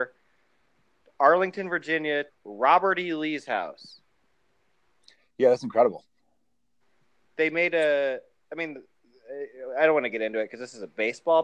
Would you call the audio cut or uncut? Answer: cut